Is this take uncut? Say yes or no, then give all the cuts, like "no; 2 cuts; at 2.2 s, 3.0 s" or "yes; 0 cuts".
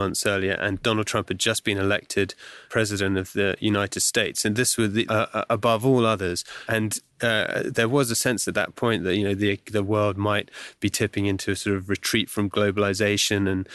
no; 1 cut; at 5.1 s